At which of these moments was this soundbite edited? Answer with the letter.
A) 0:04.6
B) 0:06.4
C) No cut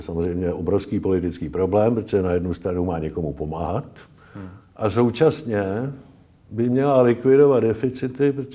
A